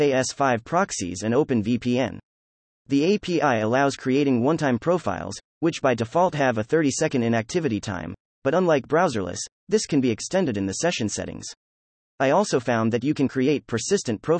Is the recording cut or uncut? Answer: uncut